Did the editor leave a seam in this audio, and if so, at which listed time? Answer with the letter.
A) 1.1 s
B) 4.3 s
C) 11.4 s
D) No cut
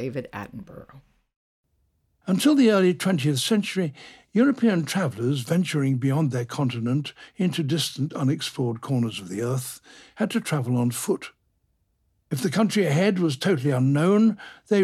D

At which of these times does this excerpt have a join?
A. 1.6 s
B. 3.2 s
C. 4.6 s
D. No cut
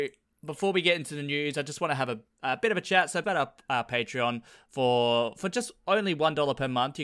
B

